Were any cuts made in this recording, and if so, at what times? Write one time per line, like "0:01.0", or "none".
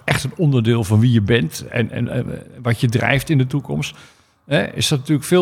0:01.9